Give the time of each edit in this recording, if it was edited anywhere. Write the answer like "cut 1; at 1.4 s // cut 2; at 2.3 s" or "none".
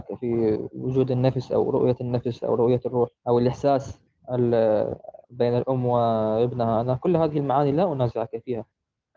cut 1; at 3.2 s // cut 2; at 5.2 s